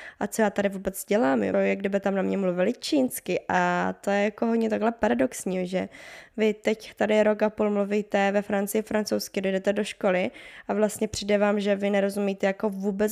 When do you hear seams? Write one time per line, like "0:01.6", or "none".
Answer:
0:01.5